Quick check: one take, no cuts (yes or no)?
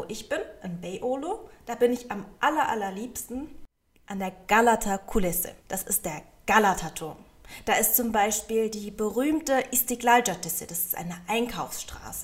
no